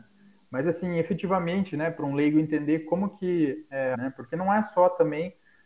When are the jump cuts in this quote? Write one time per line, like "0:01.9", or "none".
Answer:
0:03.9